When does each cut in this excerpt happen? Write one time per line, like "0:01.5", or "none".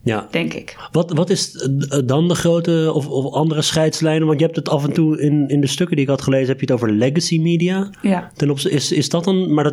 none